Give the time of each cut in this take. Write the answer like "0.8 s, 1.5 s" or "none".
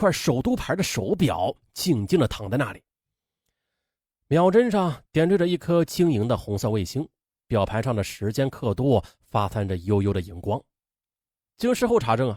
none